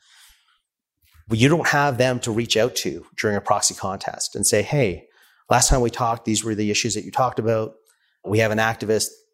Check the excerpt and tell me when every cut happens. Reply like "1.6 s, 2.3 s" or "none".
none